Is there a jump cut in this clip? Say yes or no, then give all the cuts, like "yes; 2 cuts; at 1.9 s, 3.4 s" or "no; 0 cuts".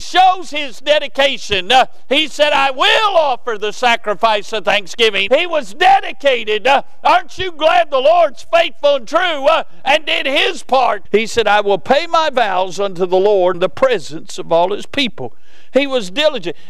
yes; 3 cuts; at 5.3 s, 11.1 s, 13.5 s